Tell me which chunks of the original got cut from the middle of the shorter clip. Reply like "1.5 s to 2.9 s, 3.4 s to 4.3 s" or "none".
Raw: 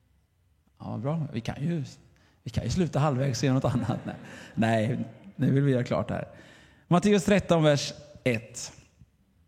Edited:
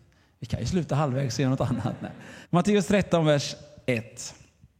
4.5 s to 6.8 s